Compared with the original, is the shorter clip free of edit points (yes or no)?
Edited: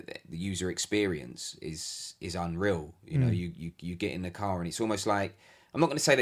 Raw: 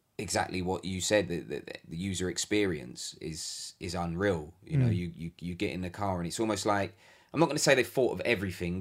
yes